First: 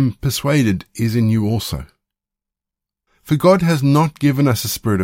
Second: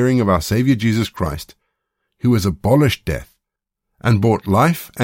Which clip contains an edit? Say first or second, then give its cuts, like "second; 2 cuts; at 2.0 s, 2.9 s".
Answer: first; 1 cut; at 3.1 s